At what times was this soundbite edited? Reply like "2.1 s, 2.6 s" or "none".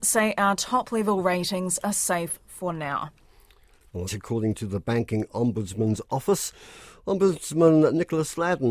4.1 s